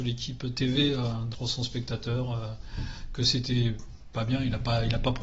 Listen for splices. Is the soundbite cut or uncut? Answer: cut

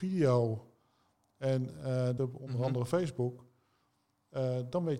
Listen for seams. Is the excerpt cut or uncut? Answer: cut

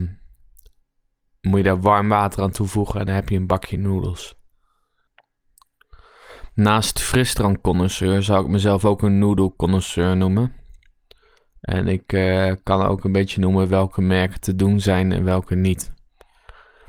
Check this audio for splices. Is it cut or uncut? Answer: uncut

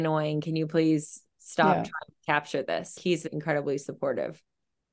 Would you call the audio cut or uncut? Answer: uncut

